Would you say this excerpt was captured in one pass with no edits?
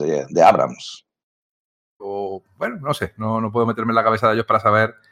no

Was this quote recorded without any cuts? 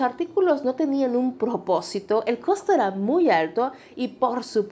yes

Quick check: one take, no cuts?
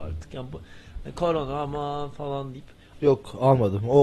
no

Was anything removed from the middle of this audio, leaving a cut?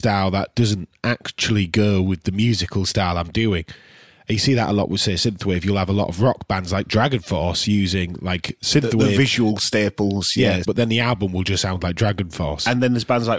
yes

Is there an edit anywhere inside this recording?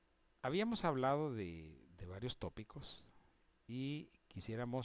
no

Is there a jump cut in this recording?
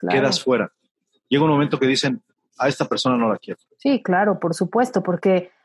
yes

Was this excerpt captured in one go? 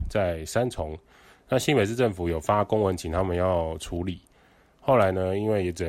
yes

